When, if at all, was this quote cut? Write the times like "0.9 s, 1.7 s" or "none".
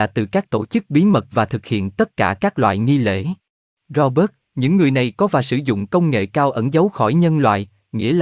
3.7 s